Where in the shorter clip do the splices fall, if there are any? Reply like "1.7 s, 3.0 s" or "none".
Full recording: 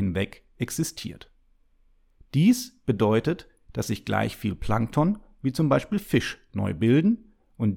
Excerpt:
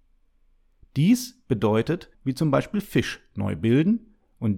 2.1 s